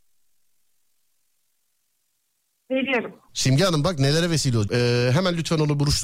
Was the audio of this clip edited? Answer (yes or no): yes